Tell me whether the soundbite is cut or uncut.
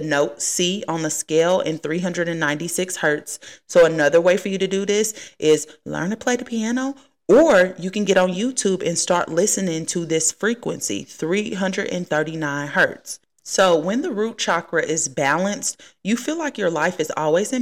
uncut